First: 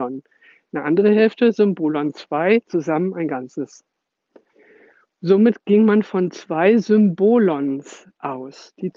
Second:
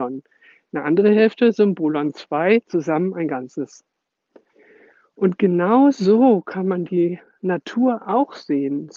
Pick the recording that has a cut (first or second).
first